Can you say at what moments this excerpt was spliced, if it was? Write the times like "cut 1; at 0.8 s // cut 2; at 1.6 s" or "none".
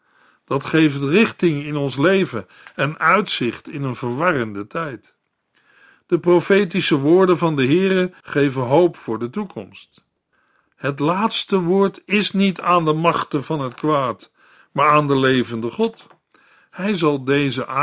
cut 1; at 8.2 s